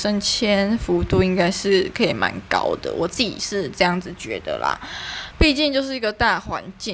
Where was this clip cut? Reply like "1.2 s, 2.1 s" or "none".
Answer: 5.3 s